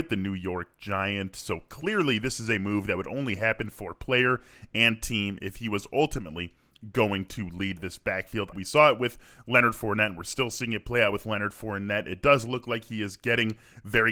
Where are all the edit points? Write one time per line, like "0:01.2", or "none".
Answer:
0:08.5